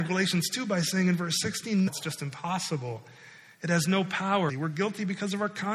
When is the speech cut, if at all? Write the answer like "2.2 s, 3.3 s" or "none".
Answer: 1.9 s, 4.5 s